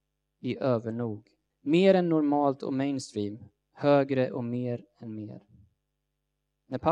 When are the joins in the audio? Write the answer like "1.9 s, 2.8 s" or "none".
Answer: 1.5 s